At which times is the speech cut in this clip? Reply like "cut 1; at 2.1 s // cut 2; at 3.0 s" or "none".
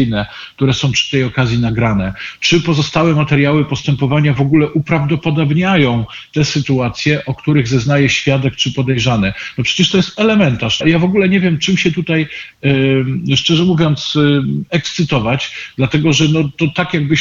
cut 1; at 10.8 s